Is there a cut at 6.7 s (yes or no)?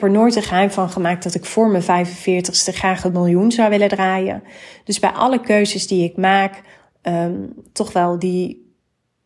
no